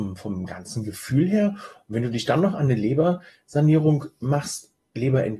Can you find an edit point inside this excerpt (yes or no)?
no